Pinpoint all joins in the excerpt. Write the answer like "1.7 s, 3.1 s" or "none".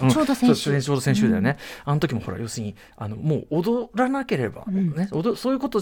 none

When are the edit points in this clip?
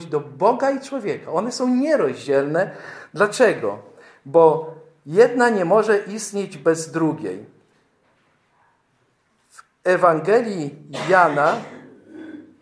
none

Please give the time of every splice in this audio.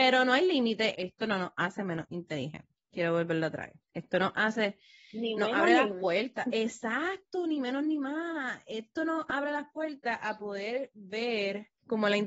0.9 s, 3.8 s

